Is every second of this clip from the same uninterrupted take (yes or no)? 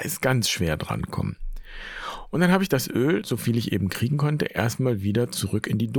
yes